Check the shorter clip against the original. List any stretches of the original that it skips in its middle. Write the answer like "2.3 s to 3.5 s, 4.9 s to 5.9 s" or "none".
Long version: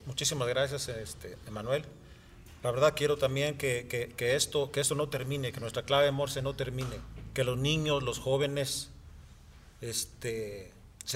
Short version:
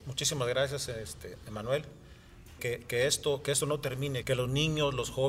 2.6 s to 3.9 s, 5.5 s to 7.3 s